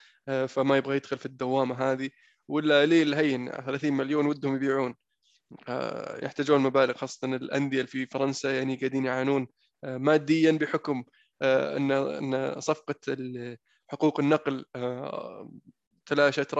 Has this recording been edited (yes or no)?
yes